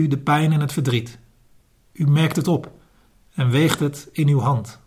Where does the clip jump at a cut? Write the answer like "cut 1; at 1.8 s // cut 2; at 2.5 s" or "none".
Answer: none